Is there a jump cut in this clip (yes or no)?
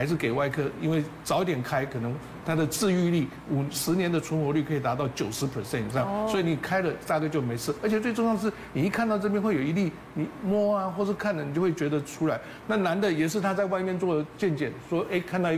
yes